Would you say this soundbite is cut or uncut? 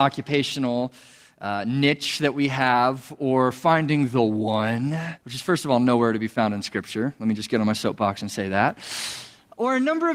cut